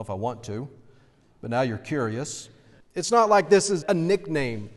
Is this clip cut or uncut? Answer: cut